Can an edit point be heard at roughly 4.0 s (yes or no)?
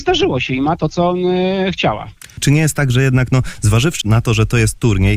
yes